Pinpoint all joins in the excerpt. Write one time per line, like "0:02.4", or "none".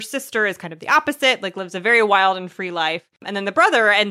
none